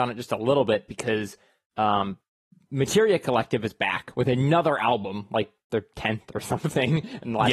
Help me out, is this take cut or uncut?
uncut